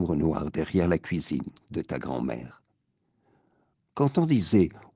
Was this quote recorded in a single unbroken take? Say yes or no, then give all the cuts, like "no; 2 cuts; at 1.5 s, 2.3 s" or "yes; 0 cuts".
yes; 0 cuts